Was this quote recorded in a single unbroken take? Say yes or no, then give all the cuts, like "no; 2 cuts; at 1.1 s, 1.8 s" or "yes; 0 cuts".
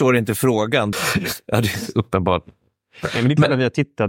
no; 1 cut; at 0.9 s